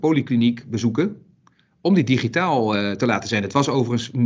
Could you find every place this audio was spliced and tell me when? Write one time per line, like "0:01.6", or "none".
none